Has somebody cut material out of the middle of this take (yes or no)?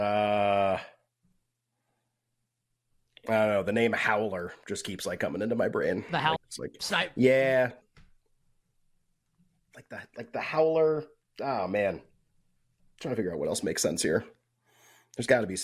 yes